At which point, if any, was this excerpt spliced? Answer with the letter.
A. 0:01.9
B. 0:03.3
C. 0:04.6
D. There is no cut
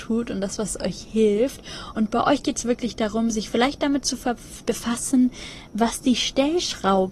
C